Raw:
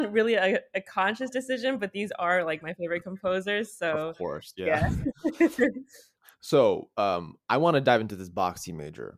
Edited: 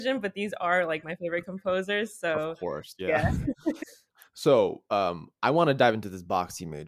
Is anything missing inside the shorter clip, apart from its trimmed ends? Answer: yes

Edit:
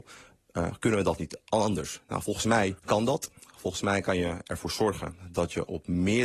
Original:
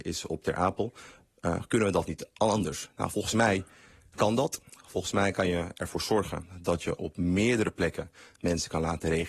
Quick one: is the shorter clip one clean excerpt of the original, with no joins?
no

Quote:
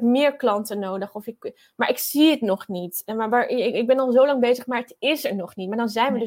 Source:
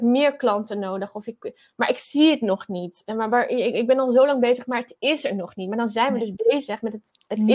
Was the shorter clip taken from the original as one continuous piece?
yes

